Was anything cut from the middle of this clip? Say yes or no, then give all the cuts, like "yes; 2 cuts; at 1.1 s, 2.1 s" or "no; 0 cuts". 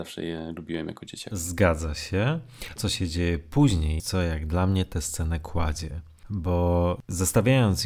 yes; 2 cuts; at 2.8 s, 4.0 s